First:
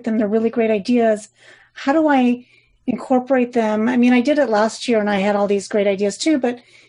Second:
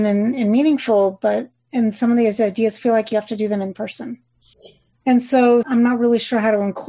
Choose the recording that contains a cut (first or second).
second